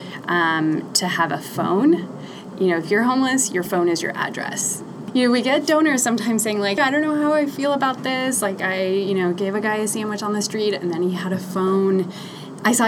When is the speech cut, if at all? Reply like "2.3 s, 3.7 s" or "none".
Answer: 6.8 s